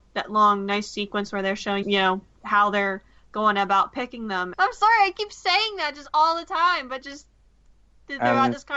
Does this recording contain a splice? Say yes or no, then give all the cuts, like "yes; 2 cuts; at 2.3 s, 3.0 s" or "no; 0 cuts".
yes; 2 cuts; at 1.8 s, 4.5 s